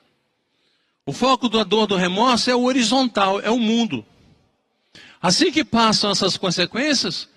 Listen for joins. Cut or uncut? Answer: uncut